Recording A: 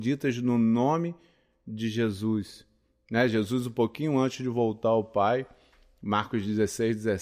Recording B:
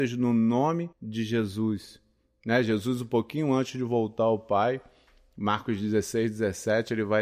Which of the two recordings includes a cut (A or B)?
B